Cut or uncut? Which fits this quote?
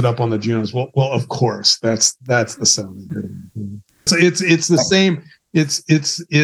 cut